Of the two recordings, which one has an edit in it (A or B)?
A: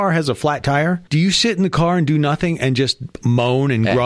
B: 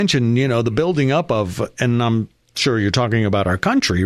A